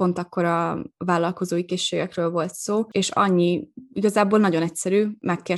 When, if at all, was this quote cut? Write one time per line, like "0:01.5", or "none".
0:02.9